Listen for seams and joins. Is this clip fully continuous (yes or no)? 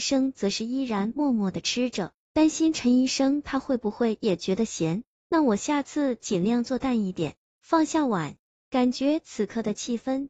yes